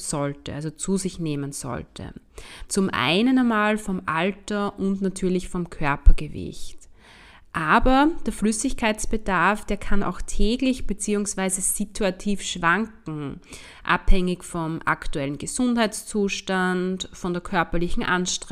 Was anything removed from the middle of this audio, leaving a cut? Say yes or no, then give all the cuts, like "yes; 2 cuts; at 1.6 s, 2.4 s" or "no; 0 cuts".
yes; 1 cut; at 2.7 s